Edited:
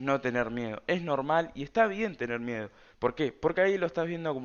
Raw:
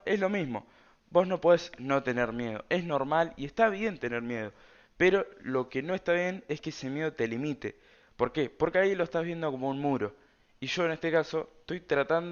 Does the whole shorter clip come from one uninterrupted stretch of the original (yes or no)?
no